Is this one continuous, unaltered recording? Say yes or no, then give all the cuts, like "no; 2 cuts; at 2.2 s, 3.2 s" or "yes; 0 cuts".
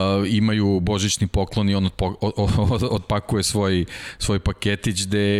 yes; 0 cuts